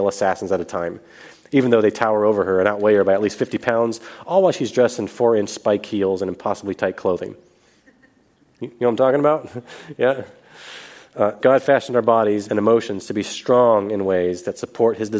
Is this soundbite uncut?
no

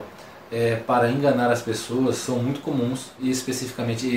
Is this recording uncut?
yes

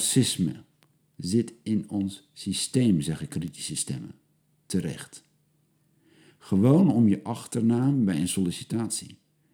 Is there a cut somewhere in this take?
no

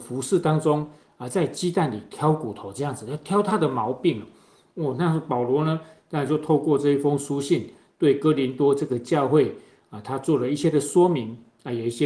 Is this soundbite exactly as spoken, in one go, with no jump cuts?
yes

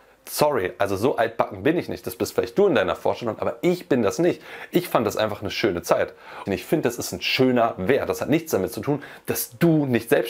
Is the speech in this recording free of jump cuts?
no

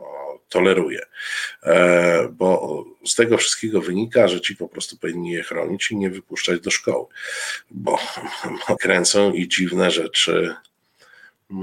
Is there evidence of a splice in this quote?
yes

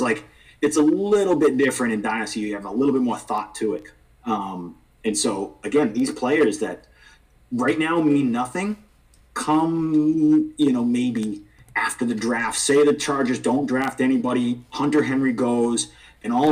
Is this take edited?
no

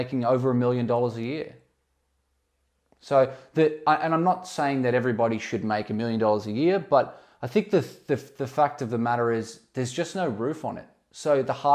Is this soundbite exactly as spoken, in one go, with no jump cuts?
yes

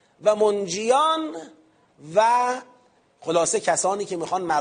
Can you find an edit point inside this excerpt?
no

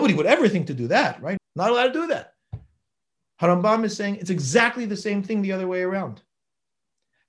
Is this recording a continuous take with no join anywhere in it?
no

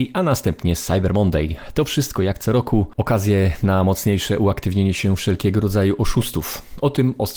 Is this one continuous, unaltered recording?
yes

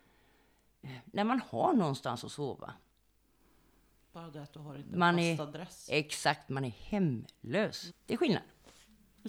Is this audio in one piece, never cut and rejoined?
no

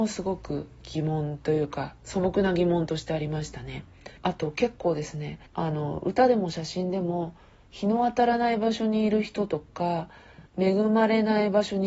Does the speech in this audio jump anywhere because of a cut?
yes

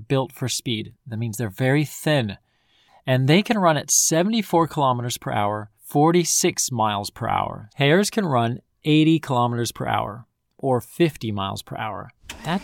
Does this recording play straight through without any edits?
no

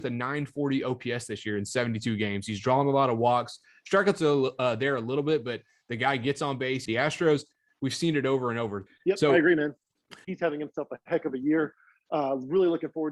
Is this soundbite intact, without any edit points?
no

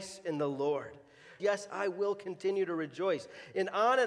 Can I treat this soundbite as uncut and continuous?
no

